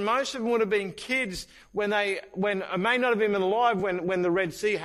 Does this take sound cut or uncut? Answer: uncut